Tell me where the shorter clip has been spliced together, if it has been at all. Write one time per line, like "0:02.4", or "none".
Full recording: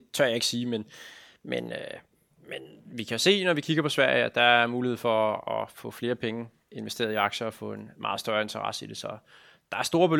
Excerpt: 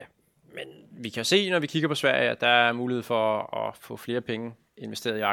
none